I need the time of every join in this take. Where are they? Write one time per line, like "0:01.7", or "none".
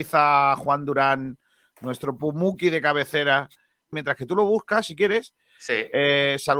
0:03.9